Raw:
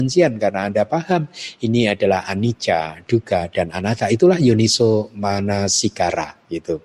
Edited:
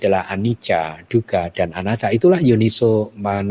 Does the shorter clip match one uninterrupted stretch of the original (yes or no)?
yes